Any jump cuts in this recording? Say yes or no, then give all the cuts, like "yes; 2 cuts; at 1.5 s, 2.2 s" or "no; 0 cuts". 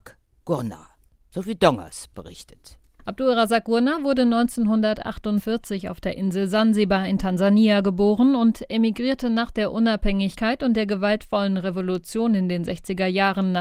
no; 0 cuts